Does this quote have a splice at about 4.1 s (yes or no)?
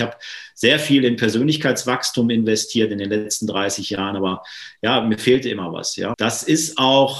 no